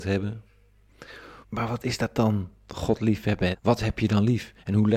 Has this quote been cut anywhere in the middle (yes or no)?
yes